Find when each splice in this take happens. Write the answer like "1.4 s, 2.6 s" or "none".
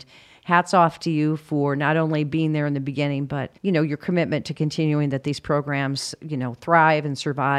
3.6 s